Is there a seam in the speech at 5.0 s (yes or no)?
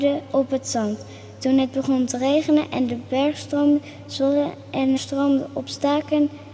yes